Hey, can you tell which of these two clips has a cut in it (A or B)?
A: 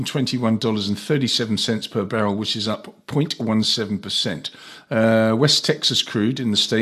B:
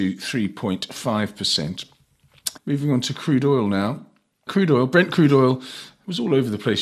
B